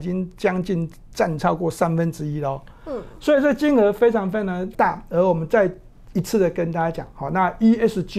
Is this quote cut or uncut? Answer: uncut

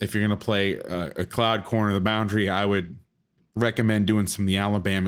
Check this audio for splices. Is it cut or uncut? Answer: uncut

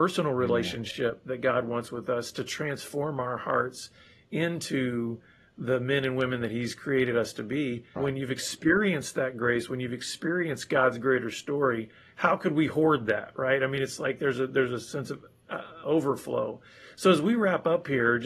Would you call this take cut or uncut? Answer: cut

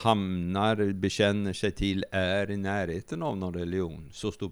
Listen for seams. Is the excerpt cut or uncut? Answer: uncut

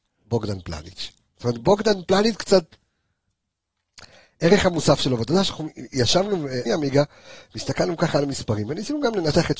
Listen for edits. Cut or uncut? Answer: cut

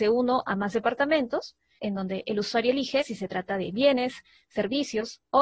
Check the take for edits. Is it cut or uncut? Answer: cut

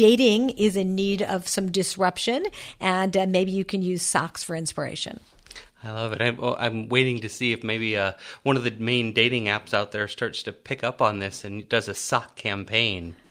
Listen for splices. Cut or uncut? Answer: uncut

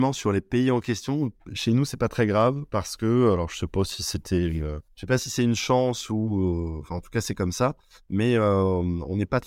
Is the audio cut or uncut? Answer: uncut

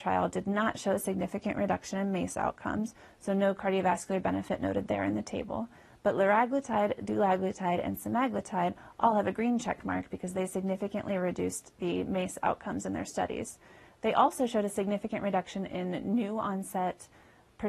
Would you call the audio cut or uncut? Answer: uncut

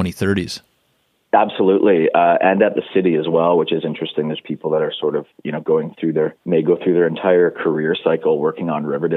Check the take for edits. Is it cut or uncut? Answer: cut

